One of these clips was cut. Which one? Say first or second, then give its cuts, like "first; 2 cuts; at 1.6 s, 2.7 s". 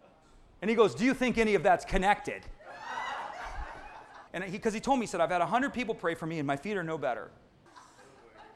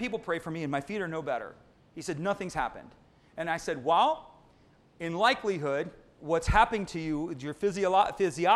first; 2 cuts; at 4.3 s, 7.7 s